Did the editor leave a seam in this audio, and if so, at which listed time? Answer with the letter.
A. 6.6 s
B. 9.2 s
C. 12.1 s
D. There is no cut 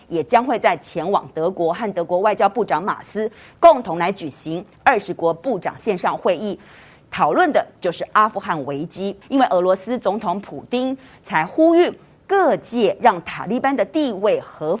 B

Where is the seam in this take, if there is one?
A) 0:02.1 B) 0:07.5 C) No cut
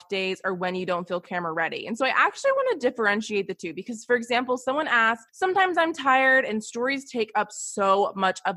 C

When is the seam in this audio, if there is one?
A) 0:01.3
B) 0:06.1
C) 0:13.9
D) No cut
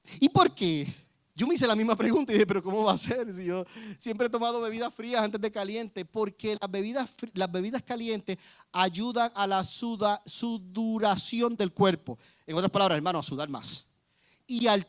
A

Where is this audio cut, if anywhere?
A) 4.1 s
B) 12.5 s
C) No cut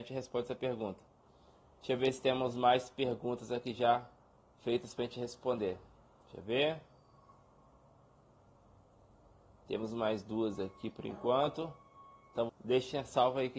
B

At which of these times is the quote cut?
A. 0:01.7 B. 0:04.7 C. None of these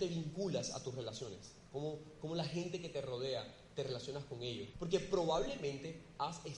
B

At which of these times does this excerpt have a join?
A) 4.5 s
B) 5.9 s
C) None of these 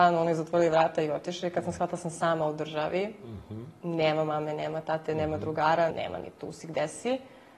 B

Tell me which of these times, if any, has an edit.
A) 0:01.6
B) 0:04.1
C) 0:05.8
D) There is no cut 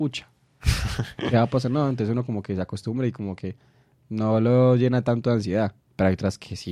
D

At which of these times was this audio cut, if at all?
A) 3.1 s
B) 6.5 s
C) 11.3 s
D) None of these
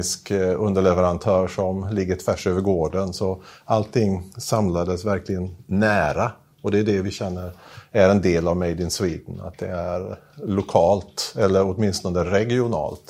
D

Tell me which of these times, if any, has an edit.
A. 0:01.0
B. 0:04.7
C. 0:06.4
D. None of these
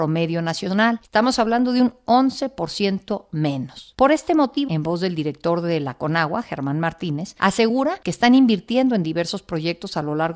B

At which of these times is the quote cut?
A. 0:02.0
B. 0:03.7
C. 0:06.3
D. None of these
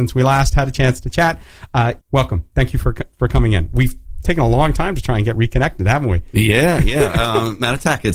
A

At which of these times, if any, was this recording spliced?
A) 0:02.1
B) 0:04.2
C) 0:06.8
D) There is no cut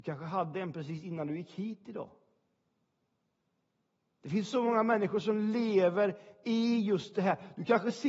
D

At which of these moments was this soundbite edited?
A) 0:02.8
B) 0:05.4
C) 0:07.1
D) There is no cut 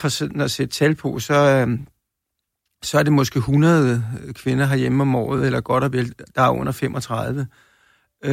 D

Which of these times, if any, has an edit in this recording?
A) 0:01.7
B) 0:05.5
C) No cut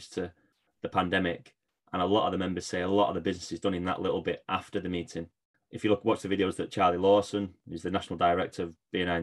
B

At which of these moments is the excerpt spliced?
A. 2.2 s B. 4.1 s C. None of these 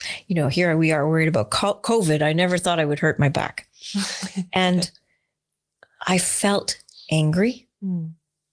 C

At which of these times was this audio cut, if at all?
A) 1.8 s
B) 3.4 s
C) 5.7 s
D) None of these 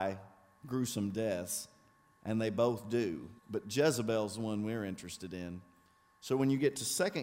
B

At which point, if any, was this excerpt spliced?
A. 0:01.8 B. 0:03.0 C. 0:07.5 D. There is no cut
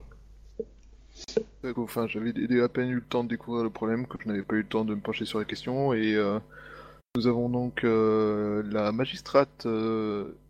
A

